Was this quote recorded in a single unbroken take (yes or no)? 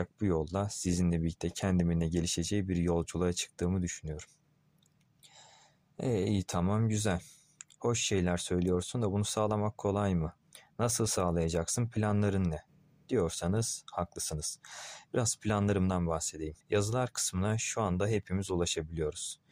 no